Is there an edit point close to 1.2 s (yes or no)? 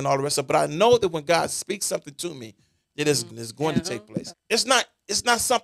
no